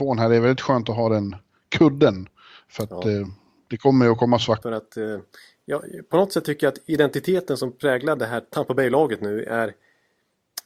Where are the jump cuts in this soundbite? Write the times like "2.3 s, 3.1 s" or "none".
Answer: 4.6 s